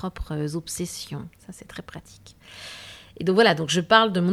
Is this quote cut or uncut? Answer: uncut